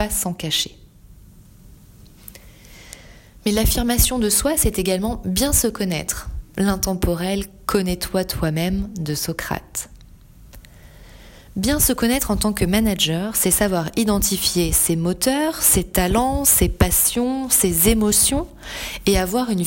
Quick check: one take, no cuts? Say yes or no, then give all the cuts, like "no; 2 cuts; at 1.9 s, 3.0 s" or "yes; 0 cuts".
yes; 0 cuts